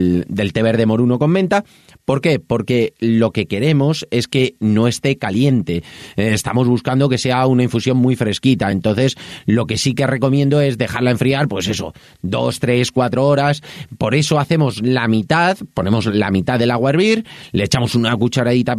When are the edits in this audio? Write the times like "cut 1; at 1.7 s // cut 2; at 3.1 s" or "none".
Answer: none